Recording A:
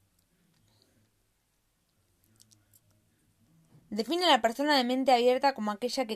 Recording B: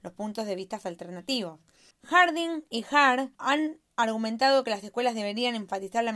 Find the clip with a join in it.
B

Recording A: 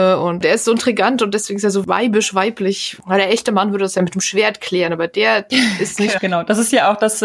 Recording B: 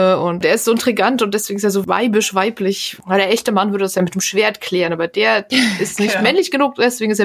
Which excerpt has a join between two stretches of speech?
A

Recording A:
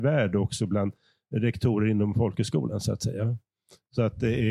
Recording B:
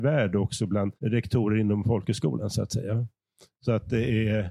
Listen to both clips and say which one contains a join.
B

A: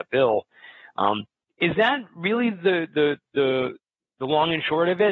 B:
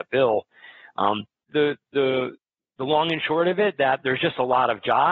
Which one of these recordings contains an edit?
B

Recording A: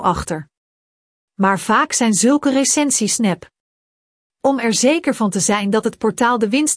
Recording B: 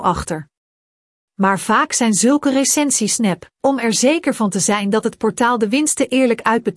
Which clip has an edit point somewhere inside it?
B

